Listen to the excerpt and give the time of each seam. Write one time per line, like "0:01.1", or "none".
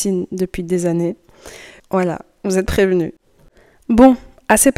0:01.8